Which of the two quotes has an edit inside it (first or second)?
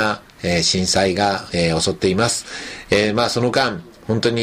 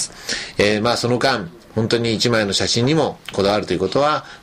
first